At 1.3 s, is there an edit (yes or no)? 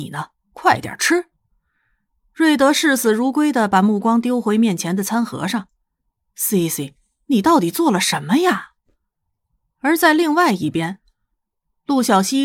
no